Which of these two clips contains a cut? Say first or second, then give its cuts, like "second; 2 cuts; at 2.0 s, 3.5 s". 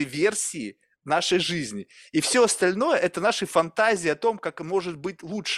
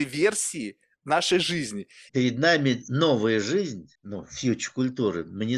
second; 2 cuts; at 2.1 s, 4.0 s